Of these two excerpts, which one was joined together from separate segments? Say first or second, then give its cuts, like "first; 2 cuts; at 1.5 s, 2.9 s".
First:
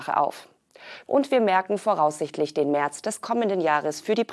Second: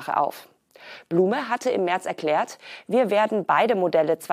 first; 1 cut; at 1.1 s